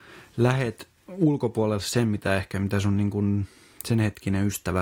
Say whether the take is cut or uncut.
cut